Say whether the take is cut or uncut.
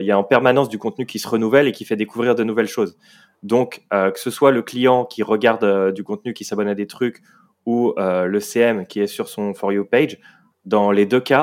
uncut